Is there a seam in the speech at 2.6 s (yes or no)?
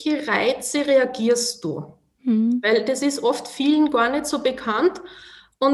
no